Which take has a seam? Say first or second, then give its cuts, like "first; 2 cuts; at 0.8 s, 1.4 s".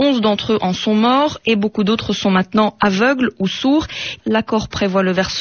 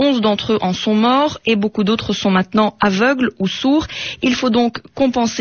first; 1 cut; at 4.2 s